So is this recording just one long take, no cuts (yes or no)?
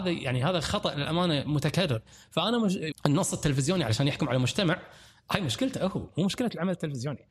no